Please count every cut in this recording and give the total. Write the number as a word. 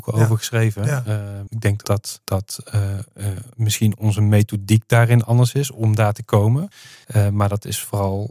one